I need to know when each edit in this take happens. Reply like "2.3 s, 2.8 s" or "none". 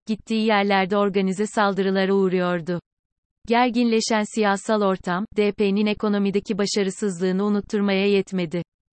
none

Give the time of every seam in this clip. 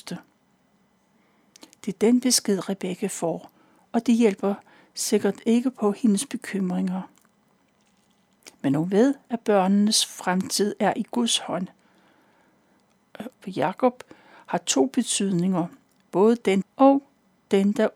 13.3 s, 16.6 s

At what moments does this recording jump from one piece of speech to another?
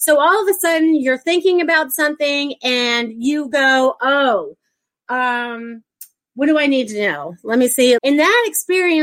8.0 s

